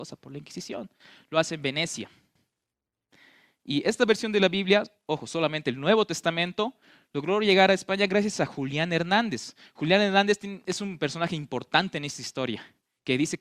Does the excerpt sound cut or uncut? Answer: uncut